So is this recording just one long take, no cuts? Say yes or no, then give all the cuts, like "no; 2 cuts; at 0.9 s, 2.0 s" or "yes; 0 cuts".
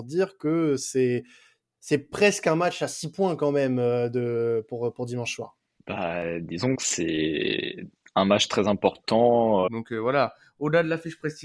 no; 2 cuts; at 5.8 s, 9.7 s